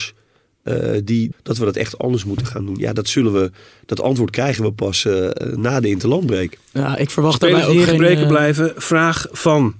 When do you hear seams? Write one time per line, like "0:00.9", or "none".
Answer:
0:01.3